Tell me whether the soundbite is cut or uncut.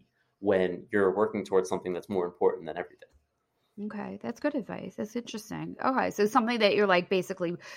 uncut